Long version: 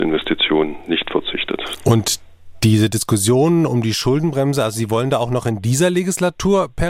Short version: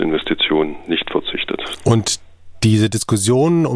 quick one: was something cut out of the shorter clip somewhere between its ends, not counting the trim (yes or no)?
no